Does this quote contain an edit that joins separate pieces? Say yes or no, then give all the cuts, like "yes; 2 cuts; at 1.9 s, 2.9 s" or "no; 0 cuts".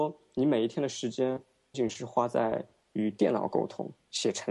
yes; 1 cut; at 1.7 s